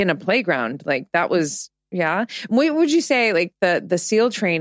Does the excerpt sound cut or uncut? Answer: uncut